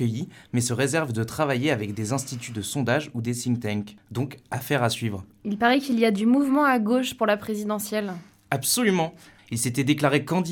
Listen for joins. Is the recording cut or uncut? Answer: cut